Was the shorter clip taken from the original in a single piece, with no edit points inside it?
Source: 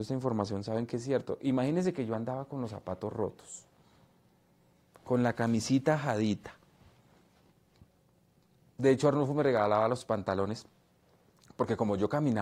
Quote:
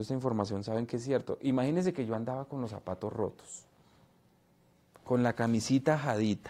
yes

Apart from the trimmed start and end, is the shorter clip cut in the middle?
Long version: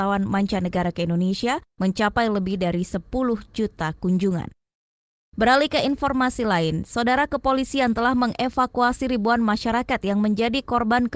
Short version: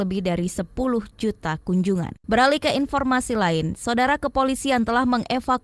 yes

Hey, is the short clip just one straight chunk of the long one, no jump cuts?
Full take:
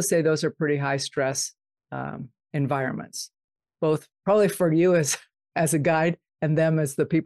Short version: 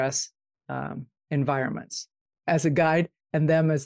no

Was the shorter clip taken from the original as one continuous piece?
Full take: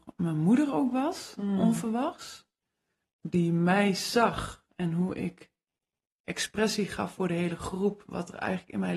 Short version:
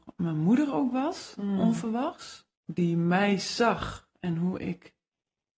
no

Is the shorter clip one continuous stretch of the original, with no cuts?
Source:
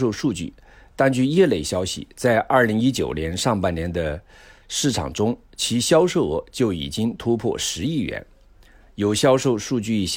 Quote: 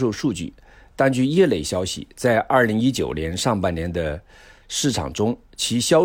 yes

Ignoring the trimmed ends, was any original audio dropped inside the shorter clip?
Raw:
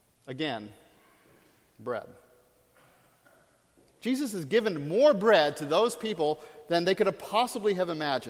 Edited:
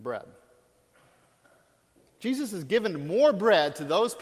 no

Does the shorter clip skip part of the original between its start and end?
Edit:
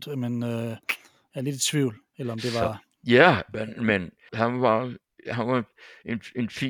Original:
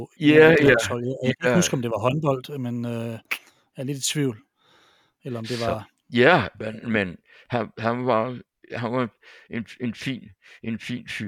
yes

